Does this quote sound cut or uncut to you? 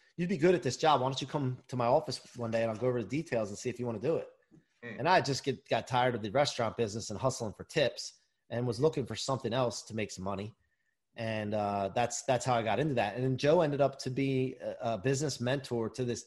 uncut